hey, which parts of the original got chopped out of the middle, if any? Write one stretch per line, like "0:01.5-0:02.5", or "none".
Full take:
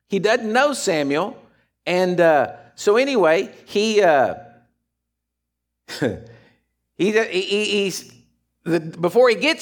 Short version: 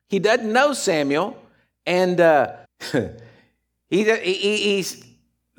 0:02.6-0:05.7